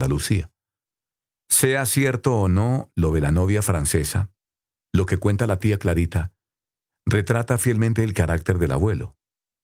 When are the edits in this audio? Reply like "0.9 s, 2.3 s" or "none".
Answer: 1.4 s